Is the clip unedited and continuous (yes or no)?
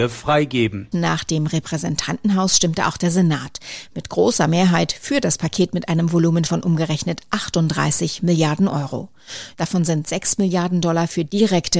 no